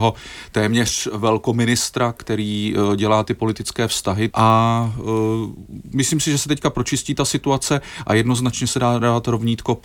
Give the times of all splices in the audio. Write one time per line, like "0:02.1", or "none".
0:04.3